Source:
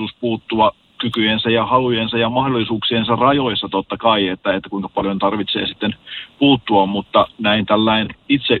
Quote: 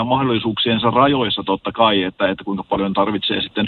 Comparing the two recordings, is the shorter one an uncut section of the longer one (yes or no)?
yes